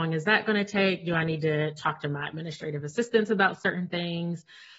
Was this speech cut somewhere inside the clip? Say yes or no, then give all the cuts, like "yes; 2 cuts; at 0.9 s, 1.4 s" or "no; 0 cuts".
no; 0 cuts